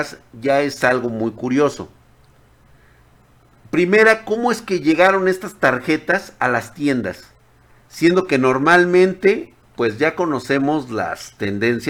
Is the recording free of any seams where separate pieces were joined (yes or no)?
yes